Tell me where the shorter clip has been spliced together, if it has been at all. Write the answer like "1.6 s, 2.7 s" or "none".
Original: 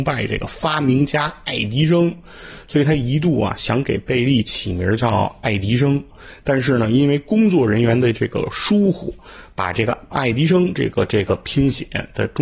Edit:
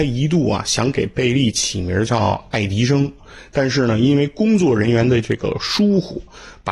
none